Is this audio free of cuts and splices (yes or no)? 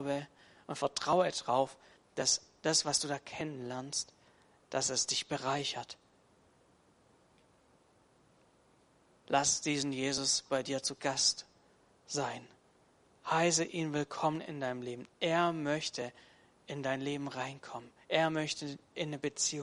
yes